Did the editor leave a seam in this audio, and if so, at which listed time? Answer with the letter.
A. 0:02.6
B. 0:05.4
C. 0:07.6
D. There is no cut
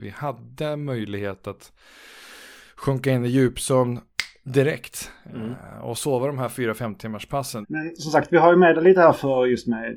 C